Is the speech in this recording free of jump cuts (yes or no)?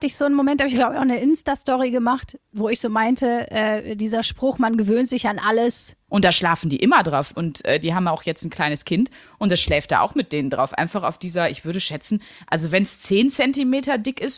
no